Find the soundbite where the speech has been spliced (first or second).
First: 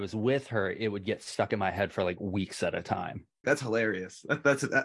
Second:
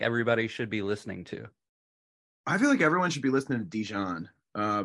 first